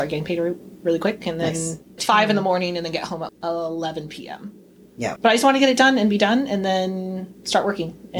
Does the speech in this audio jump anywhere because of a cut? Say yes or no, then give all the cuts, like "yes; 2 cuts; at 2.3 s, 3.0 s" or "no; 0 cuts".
yes; 3 cuts; at 2.0 s, 3.3 s, 5.2 s